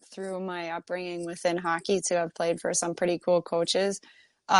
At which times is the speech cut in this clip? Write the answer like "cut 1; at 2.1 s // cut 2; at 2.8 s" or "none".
none